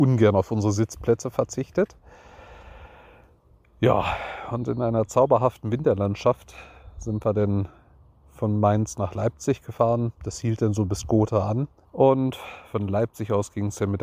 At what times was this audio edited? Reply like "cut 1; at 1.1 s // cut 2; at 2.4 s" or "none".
cut 1; at 11.8 s